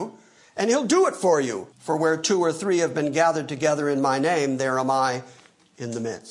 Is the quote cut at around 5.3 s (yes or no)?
no